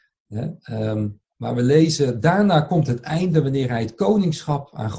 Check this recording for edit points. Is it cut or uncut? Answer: cut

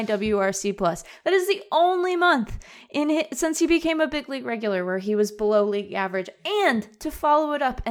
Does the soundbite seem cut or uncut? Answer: uncut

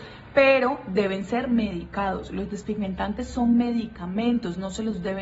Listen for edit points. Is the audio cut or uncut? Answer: uncut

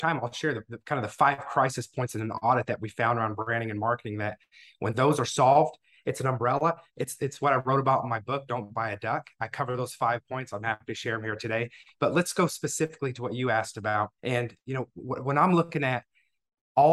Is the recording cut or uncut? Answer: cut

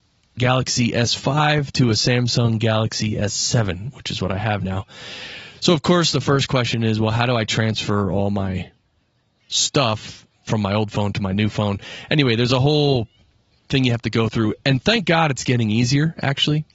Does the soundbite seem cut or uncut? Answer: uncut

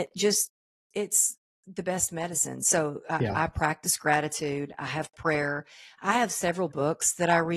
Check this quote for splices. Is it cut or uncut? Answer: uncut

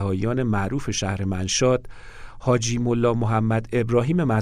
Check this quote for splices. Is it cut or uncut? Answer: uncut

